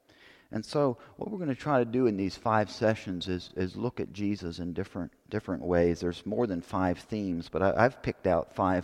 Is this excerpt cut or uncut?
uncut